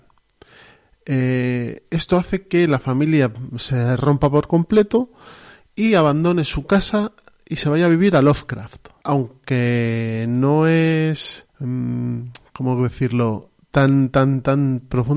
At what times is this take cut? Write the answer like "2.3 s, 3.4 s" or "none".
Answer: 9.0 s, 11.5 s